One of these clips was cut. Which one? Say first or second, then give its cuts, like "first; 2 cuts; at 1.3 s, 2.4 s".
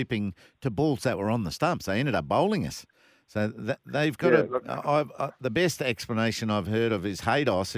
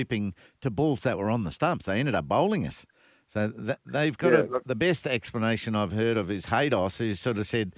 second; 1 cut; at 4.6 s